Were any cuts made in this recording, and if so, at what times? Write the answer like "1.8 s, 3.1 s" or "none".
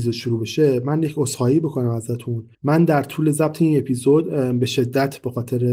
2.5 s

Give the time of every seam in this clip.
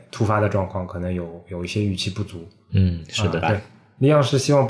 3.4 s

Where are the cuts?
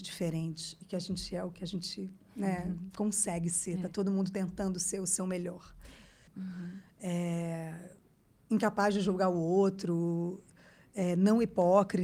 6.3 s

